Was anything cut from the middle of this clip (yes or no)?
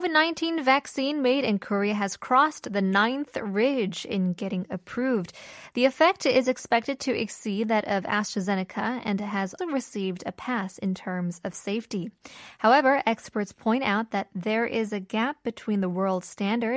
yes